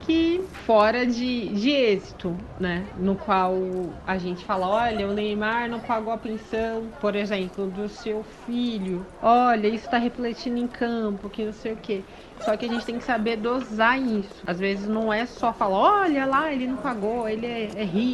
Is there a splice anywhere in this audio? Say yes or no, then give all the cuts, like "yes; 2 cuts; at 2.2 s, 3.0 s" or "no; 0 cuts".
yes; 1 cut; at 12.3 s